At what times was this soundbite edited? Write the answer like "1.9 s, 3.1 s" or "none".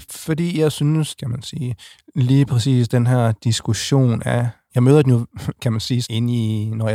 1.2 s, 4.7 s, 6.0 s